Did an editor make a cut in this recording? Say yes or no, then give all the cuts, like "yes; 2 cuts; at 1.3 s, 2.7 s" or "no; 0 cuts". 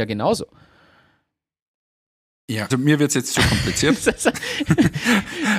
yes; 1 cut; at 2.7 s